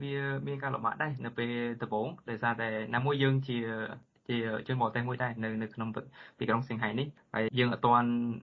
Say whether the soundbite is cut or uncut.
cut